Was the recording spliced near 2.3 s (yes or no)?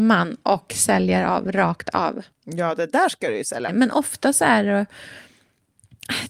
yes